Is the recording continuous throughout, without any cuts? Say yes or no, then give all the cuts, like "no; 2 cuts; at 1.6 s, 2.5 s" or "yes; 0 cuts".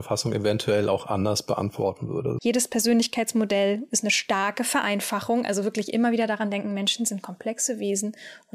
no; 1 cut; at 2.4 s